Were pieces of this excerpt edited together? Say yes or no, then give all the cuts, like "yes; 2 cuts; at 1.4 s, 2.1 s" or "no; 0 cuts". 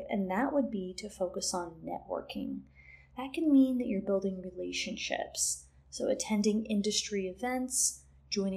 no; 0 cuts